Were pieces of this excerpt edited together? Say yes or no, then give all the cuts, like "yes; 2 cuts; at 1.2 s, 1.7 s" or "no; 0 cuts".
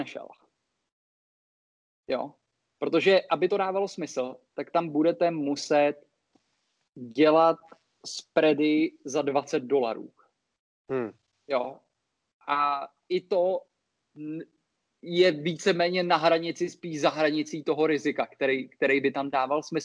no; 0 cuts